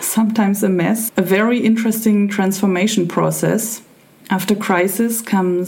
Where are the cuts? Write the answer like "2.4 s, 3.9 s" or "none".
1.1 s, 4.2 s